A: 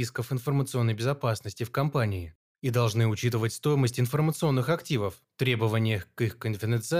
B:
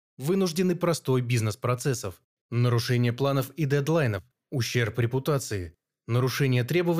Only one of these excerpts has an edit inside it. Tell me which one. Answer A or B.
B